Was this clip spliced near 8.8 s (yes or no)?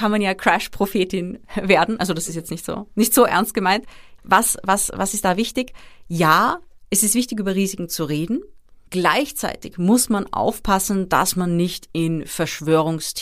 no